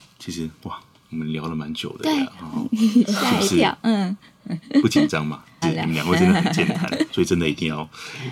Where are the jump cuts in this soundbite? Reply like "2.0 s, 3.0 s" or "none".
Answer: 5.6 s, 7.1 s